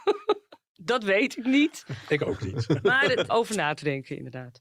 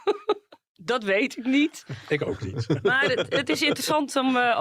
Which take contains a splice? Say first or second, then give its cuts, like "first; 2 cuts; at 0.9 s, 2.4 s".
first; 1 cut; at 3.3 s